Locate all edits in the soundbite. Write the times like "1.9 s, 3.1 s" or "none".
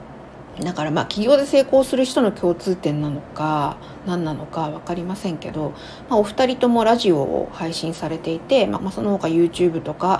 8.8 s